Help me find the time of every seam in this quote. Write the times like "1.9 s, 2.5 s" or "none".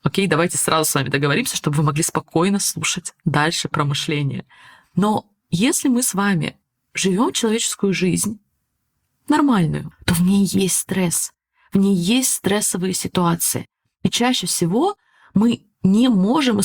9.9 s